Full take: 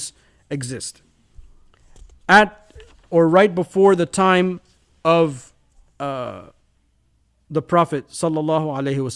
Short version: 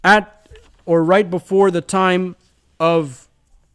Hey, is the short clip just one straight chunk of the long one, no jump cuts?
yes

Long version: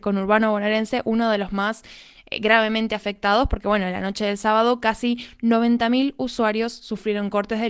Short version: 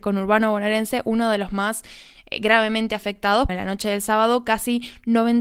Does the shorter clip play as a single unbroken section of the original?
no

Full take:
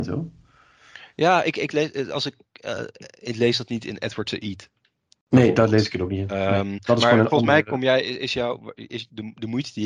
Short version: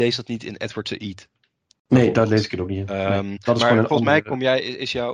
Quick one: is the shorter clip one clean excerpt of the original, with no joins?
yes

